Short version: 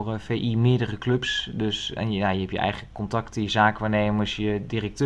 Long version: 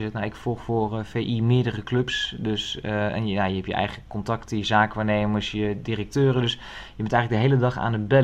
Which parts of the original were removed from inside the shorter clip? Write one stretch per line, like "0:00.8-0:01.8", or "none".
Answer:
0:02.8-0:03.1